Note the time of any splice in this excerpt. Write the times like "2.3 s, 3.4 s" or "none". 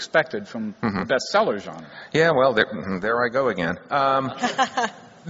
none